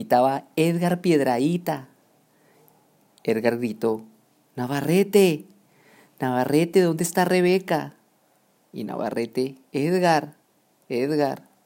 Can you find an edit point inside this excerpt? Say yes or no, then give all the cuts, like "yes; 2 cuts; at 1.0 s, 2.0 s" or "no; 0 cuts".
no; 0 cuts